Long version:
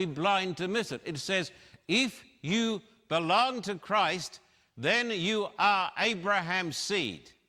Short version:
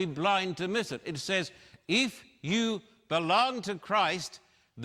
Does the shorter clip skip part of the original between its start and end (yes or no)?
no